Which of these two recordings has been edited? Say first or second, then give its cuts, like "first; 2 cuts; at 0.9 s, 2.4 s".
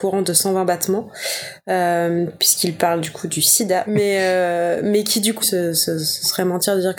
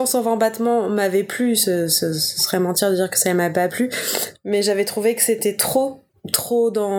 first; 2 cuts; at 3.9 s, 5.4 s